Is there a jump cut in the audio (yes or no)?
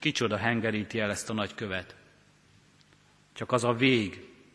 no